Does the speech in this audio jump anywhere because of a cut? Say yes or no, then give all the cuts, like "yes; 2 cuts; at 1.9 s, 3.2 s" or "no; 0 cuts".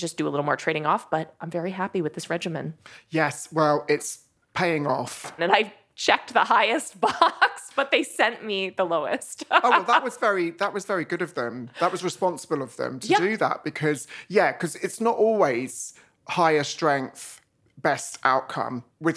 yes; 1 cut; at 5.4 s